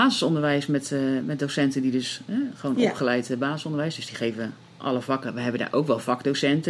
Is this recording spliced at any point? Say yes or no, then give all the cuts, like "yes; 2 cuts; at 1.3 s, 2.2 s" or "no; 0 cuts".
no; 0 cuts